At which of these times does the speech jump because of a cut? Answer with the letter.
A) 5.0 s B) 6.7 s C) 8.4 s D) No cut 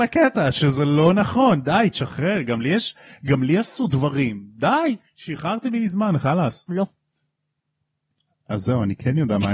B